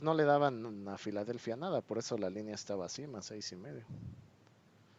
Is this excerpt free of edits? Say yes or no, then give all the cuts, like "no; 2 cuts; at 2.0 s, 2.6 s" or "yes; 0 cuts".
yes; 0 cuts